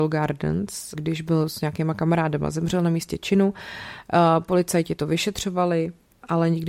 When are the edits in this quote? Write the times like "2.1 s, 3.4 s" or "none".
0.9 s